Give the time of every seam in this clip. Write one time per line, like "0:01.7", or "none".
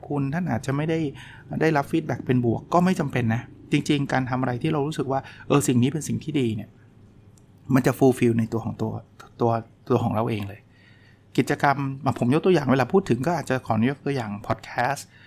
none